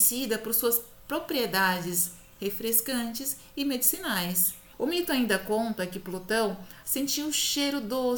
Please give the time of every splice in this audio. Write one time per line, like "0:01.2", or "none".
0:04.7
0:06.8

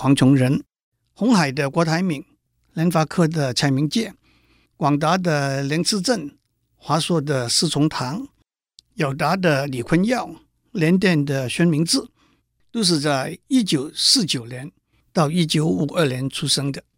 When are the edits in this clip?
none

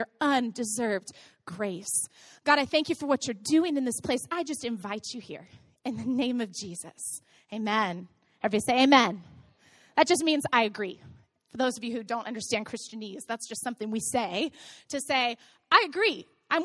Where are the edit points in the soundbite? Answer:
none

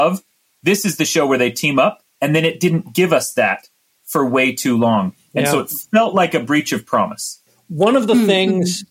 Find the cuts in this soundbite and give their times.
none

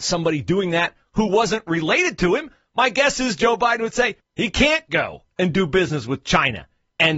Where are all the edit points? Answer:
0:04.2

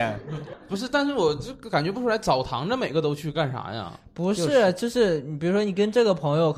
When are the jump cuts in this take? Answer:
none

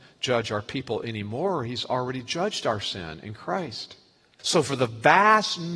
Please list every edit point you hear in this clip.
0:04.4

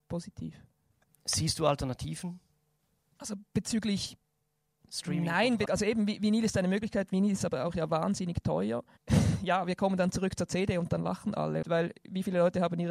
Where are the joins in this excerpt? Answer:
0:05.7
0:11.6

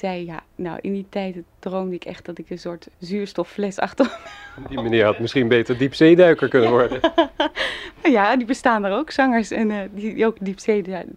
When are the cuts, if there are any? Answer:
0:02.9

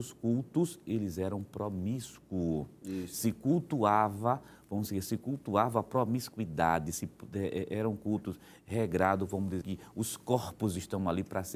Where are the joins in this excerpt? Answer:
0:09.6

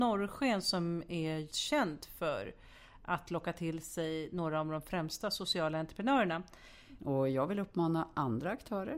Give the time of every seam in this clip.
0:01.5
0:07.0

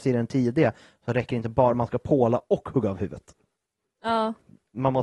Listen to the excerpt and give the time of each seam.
none

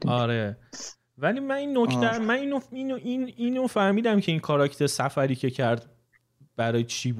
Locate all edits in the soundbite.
none

